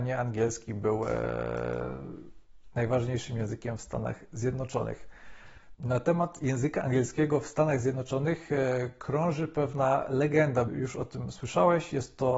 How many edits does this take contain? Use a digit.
2